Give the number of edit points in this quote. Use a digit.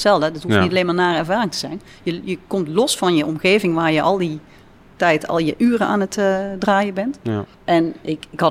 1